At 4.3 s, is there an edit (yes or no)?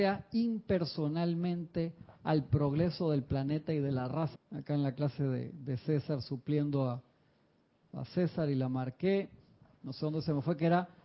yes